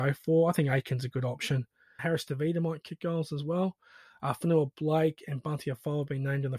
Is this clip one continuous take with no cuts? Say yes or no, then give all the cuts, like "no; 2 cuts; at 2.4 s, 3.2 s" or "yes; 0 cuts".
no; 1 cut; at 2.0 s